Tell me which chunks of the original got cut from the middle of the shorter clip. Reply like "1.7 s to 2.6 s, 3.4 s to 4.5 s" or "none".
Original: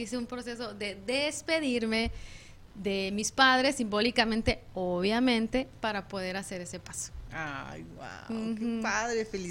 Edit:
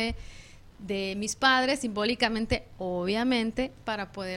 none